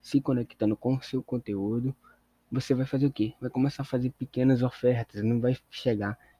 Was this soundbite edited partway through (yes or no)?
no